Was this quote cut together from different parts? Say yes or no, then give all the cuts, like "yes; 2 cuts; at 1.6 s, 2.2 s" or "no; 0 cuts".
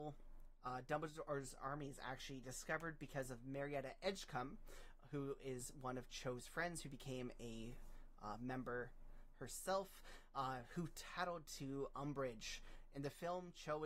no; 0 cuts